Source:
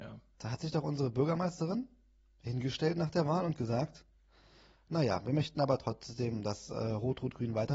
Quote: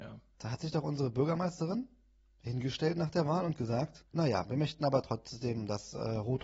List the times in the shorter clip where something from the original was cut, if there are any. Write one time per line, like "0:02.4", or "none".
0:04.1